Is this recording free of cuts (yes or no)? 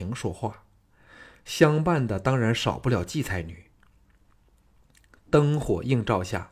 yes